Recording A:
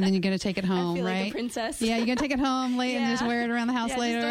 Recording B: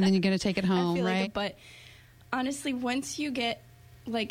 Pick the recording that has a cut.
B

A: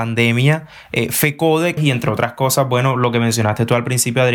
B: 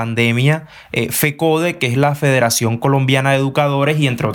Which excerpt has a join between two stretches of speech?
A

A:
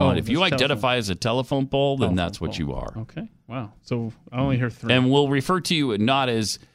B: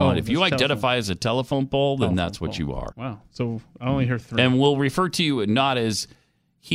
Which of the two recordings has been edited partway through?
B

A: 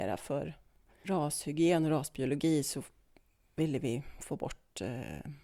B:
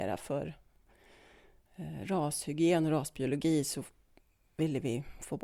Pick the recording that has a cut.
A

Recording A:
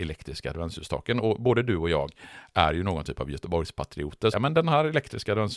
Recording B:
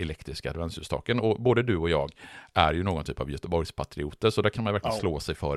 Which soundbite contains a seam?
A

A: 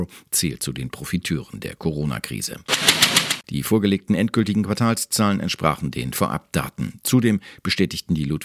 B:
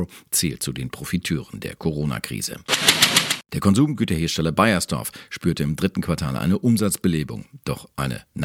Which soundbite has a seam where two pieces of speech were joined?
A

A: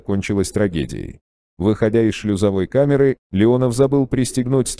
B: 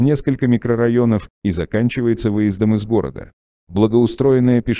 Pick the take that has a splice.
B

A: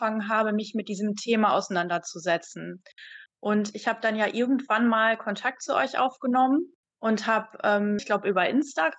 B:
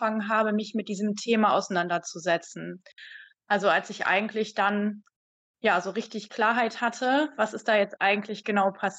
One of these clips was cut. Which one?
A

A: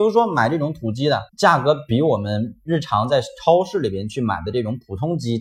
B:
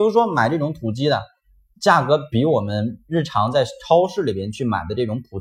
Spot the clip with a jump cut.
A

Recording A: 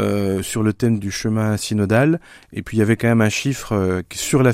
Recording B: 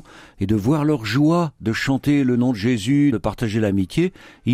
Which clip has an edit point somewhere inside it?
B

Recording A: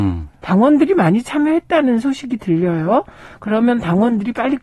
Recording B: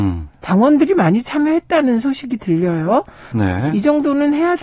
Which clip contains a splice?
B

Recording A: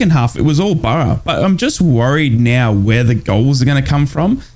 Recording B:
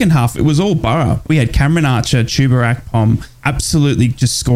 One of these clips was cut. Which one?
B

